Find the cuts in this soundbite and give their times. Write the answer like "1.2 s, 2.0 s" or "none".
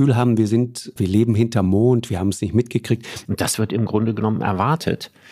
1.0 s, 3.3 s